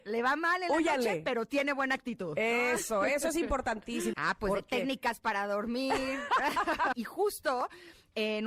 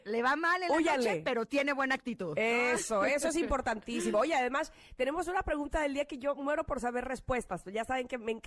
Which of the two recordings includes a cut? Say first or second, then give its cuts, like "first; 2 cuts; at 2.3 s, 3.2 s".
first; 2 cuts; at 4.1 s, 6.9 s